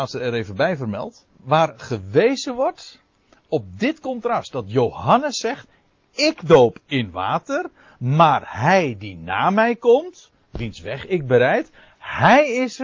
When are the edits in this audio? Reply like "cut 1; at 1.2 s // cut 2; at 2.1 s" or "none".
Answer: cut 1; at 1.3 s